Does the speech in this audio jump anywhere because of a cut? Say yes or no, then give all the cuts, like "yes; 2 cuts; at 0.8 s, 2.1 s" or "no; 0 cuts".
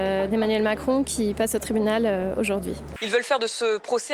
yes; 1 cut; at 3.0 s